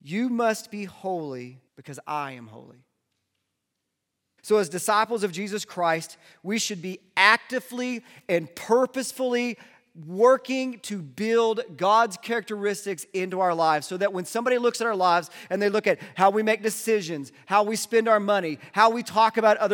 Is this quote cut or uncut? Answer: cut